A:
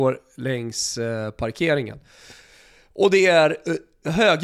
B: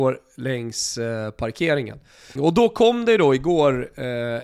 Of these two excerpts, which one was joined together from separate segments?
B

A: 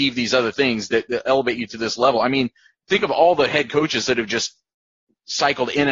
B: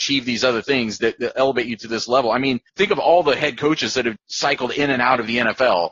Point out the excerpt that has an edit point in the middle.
B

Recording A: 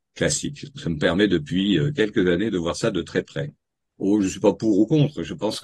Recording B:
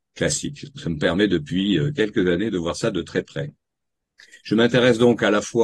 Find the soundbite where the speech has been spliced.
A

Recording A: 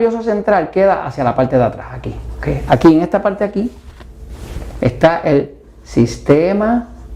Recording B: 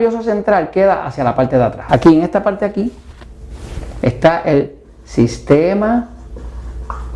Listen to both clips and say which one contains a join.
B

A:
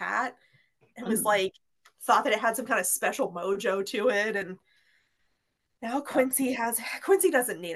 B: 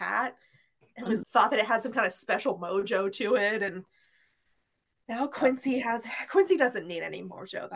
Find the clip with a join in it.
B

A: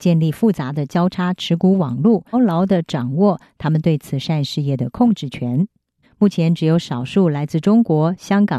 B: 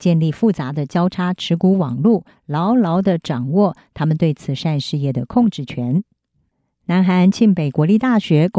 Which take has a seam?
A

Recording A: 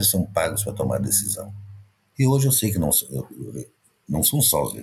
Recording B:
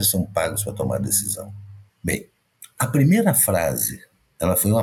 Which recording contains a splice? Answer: B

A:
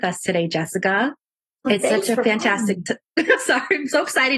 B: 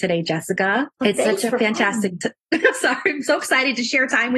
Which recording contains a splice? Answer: B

